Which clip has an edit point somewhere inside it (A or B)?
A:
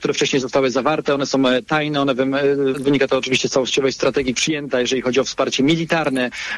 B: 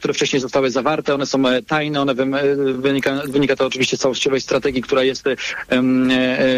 A